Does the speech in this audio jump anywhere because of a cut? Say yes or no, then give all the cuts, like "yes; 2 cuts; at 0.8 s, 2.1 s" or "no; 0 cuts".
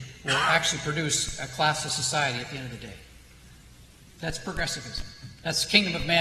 no; 0 cuts